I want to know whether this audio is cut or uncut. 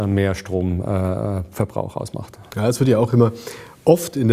uncut